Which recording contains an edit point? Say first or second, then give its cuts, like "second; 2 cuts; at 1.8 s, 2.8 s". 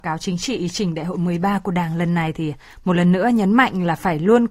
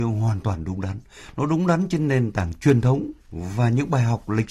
second; 1 cut; at 3.2 s